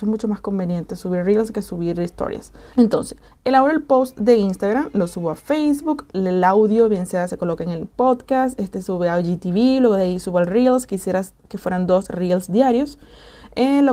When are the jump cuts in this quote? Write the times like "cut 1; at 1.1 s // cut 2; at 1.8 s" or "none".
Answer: cut 1; at 2.7 s